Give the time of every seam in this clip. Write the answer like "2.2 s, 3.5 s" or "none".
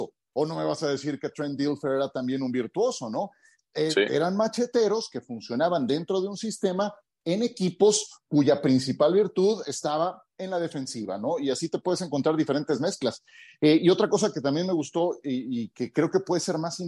none